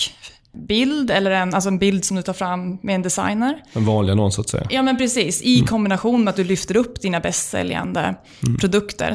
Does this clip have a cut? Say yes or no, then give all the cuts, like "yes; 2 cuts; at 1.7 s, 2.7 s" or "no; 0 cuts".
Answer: no; 0 cuts